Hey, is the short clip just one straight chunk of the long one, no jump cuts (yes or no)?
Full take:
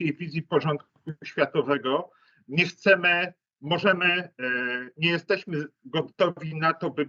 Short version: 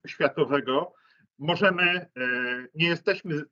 no